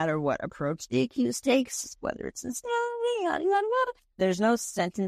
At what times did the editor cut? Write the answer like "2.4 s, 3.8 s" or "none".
4.2 s